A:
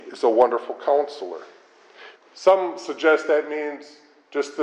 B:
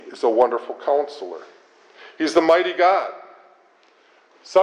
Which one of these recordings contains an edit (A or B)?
A